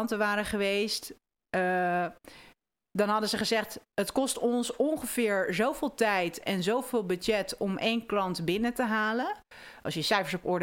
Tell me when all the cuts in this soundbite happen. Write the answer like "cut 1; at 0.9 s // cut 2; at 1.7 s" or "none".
none